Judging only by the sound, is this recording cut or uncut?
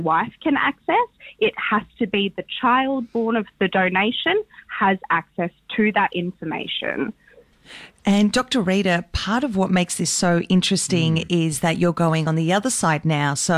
uncut